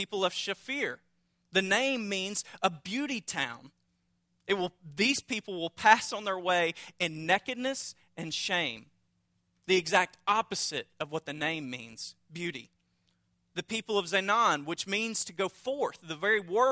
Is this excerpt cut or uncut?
uncut